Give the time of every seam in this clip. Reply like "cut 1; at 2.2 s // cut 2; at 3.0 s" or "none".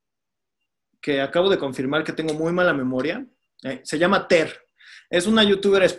none